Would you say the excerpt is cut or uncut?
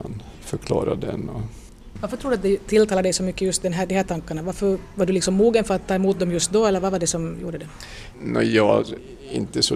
cut